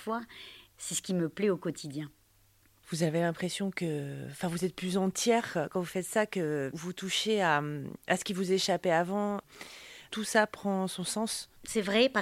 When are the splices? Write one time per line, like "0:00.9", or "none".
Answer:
0:06.7